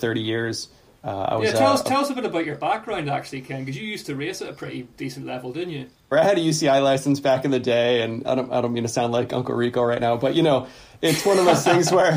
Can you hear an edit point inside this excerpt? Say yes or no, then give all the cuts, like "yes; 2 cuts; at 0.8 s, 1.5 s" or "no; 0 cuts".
yes; 1 cut; at 6.1 s